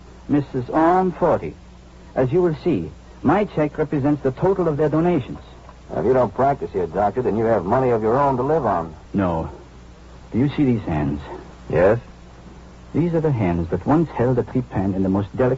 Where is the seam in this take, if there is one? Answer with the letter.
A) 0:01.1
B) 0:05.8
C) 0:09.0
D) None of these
C